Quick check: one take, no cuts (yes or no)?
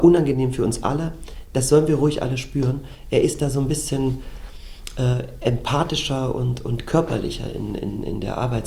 yes